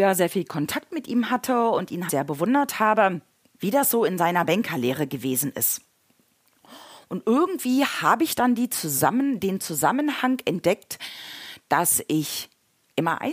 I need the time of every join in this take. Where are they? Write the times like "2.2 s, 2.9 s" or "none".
2.1 s, 3.6 s